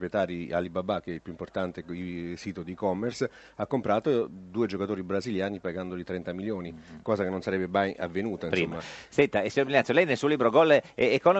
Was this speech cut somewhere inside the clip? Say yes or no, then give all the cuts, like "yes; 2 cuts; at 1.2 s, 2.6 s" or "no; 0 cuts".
no; 0 cuts